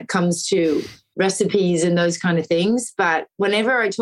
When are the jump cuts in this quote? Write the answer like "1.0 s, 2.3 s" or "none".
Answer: none